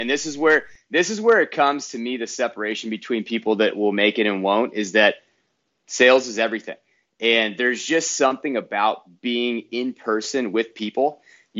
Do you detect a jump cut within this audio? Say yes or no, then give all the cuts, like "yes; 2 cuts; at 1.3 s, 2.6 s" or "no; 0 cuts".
no; 0 cuts